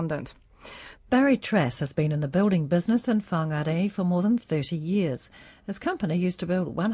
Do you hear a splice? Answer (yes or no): yes